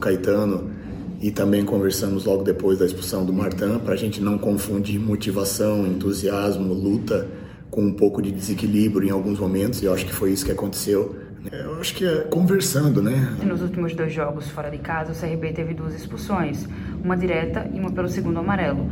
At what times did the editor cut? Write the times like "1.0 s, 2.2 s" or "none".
11.5 s, 13.4 s